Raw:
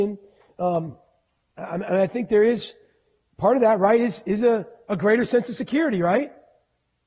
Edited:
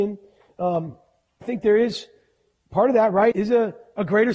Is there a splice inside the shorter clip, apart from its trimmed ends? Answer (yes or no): yes